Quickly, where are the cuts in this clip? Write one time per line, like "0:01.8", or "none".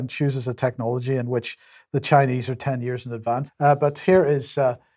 0:03.5